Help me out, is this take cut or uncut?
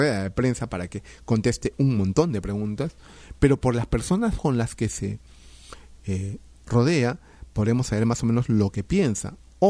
uncut